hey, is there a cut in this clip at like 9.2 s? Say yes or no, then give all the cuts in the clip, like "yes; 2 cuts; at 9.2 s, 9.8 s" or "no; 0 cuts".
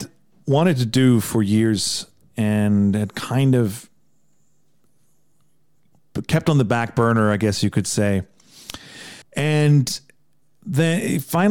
yes; 1 cut; at 9.2 s